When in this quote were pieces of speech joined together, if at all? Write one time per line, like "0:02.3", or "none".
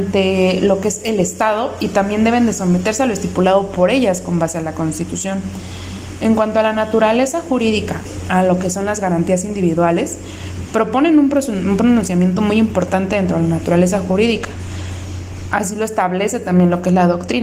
none